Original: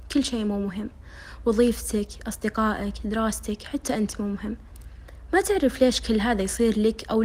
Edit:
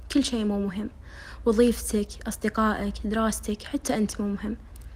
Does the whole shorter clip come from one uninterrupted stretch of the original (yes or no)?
yes